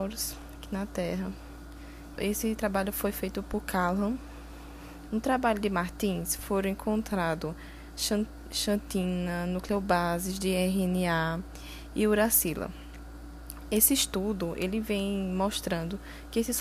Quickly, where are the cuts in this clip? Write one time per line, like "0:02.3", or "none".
0:02.2
0:05.1